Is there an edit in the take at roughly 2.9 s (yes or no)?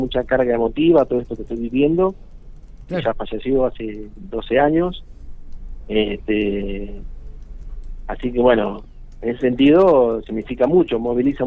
yes